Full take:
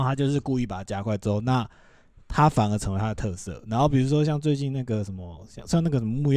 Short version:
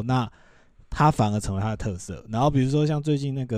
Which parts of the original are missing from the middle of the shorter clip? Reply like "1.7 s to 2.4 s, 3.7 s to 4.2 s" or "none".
none